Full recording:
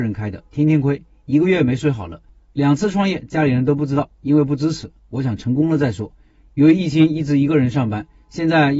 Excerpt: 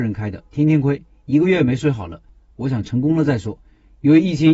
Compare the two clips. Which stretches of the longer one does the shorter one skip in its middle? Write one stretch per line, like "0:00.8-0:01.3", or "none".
0:02.5-0:05.0